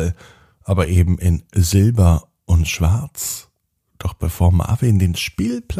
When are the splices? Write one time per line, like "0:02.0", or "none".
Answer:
0:03.8